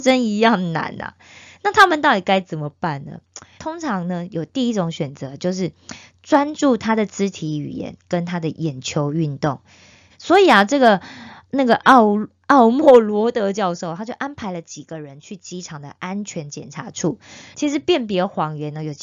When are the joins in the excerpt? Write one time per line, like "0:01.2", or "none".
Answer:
0:03.6
0:10.1
0:17.5